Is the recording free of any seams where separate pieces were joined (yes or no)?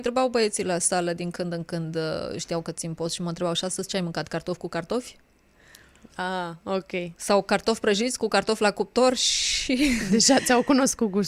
yes